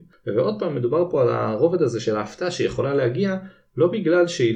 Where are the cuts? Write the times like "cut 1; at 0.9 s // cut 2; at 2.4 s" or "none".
none